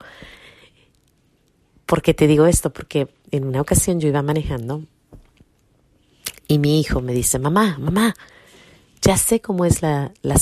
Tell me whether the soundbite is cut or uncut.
uncut